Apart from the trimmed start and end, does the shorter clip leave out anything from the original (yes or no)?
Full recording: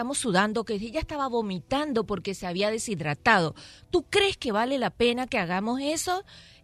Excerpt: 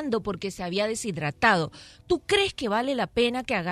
no